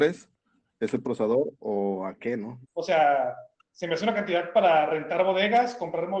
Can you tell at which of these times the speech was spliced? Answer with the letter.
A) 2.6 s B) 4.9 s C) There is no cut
A